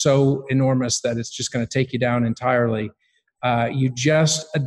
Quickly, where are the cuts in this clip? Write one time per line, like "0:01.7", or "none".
none